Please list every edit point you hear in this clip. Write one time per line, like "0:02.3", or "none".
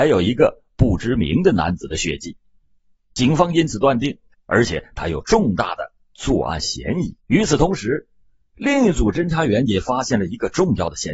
0:04.3
0:07.2